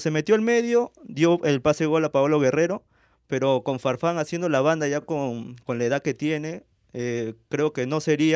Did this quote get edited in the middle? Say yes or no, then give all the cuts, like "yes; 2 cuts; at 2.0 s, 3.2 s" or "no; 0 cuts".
no; 0 cuts